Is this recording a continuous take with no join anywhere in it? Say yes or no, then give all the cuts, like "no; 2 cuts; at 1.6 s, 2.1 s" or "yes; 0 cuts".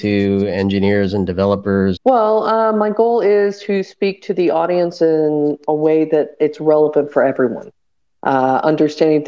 no; 1 cut; at 2.0 s